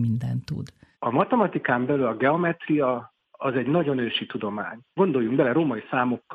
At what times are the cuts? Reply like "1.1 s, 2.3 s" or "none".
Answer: 0.9 s, 4.9 s